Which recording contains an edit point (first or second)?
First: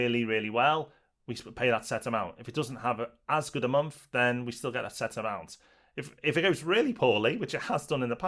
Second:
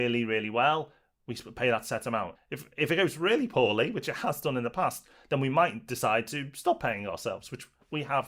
second